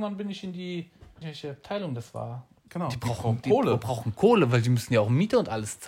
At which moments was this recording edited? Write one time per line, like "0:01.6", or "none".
0:01.2
0:02.7

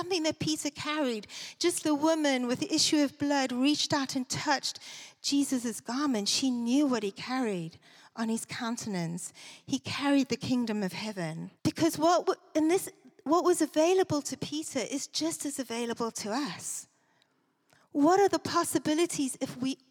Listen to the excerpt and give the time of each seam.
0:01.8
0:11.6

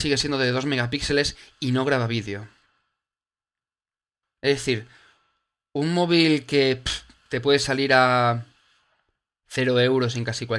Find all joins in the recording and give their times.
0:04.2

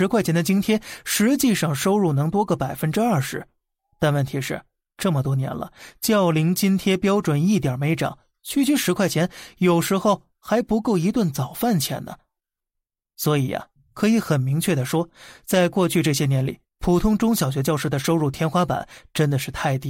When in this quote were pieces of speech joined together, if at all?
none

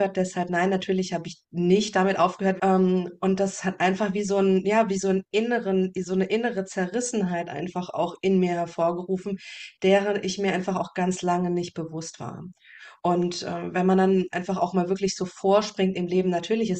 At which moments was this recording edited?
0:02.6

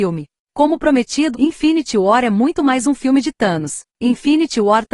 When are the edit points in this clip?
0:01.3
0:03.9

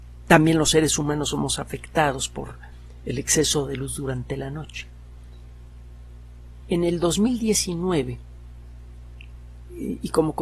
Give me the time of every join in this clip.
0:06.6

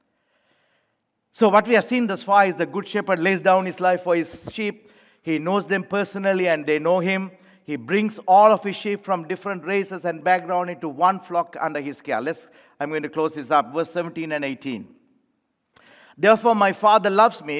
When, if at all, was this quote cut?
none

